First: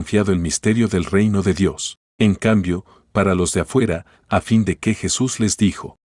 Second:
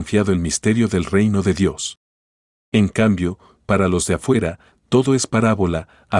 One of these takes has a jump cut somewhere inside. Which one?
first; 2 cuts; at 2.1 s, 4.2 s

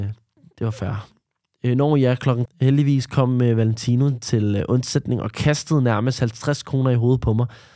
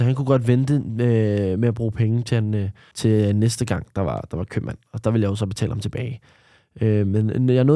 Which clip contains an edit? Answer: first; 1 cut; at 2.5 s

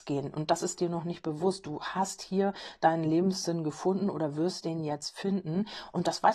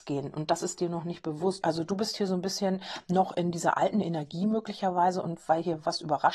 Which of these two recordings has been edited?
second; 1 cut; at 1.6 s

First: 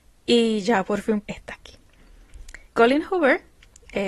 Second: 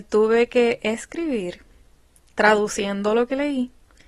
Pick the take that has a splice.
first; 2 cuts; at 1.2 s, 2.7 s

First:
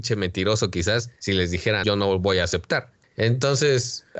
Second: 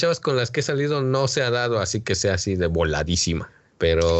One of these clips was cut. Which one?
first; 2 cuts; at 1.8 s, 3.0 s

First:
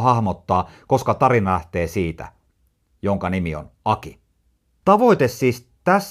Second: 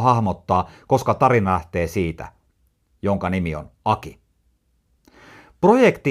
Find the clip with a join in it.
first; 1 cut; at 4.8 s

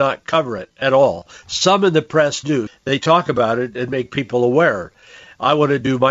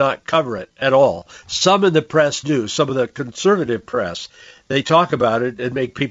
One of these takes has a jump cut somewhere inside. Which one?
first; 1 cut; at 2.7 s

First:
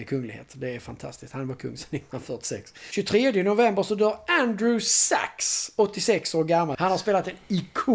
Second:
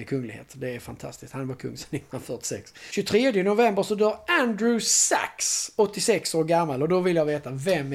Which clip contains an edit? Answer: first; 1 cut; at 6.7 s

